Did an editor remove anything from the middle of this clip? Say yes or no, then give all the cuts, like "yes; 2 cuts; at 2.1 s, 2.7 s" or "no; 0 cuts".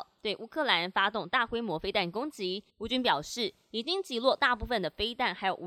yes; 1 cut; at 2.7 s